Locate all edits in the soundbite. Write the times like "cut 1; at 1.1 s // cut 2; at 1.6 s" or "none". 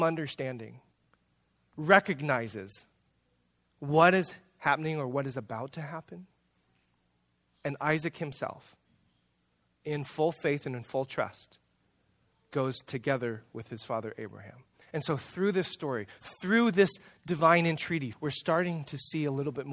cut 1; at 14.8 s // cut 2; at 18.1 s